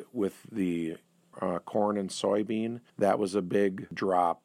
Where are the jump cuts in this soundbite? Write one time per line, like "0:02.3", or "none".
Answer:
0:01.3
0:02.9